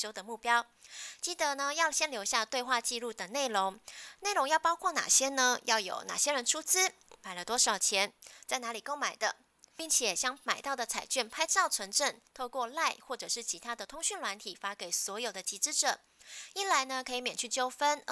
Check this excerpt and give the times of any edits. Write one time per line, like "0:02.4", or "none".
none